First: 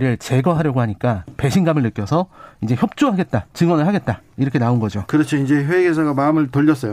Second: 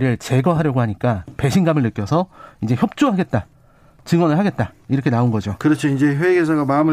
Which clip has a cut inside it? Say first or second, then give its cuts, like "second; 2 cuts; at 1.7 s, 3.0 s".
first; 1 cut; at 3.5 s